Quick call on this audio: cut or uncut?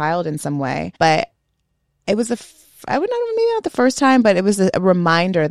cut